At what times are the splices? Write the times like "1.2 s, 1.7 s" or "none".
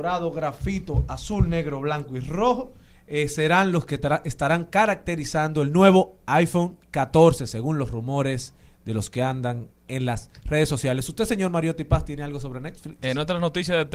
none